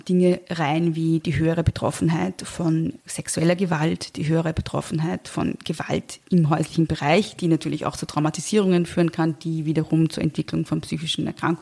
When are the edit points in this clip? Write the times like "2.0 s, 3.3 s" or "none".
3.0 s